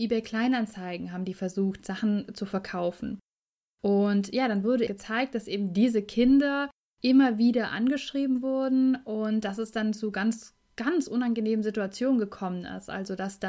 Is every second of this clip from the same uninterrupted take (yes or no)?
no